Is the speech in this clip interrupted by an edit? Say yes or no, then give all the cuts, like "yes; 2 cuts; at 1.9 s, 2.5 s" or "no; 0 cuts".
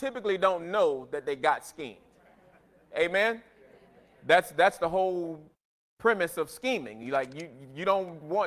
no; 0 cuts